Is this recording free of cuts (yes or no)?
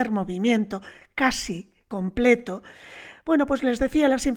yes